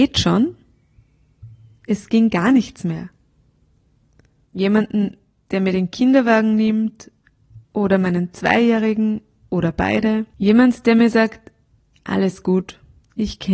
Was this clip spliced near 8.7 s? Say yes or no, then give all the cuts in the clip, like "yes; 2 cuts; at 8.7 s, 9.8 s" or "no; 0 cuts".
no; 2 cuts; at 4.5 s, 10.3 s